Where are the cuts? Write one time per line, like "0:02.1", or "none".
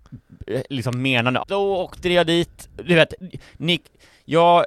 0:01.4